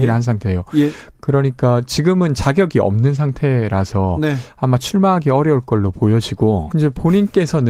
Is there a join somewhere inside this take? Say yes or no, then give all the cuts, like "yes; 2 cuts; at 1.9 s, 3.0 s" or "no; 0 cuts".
yes; 1 cut; at 6.7 s